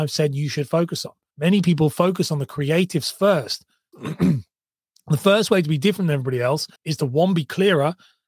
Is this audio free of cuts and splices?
no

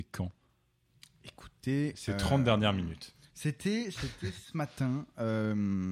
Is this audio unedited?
yes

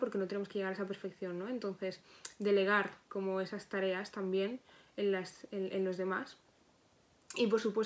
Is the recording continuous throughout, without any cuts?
yes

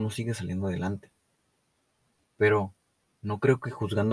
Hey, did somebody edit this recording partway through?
no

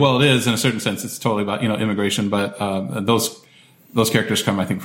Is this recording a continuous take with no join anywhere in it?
yes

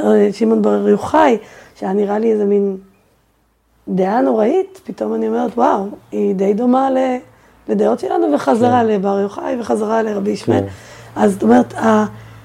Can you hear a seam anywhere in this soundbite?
no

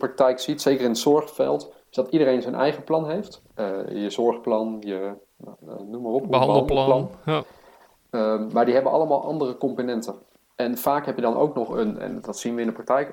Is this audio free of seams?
yes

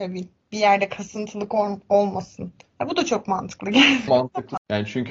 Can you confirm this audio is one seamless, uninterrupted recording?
no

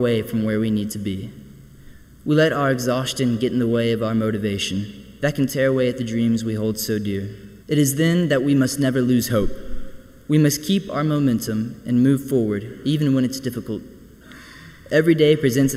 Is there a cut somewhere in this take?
yes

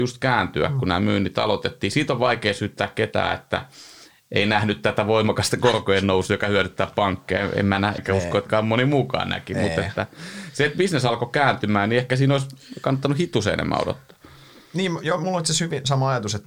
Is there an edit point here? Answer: yes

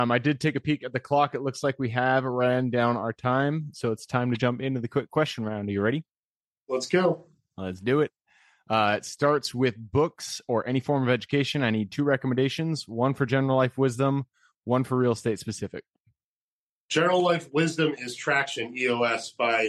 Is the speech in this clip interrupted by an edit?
no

